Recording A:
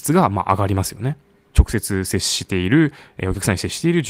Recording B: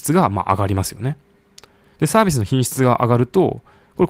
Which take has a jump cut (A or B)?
A